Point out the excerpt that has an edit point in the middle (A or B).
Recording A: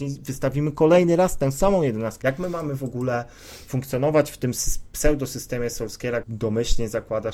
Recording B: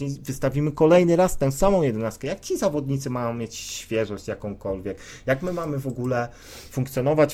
A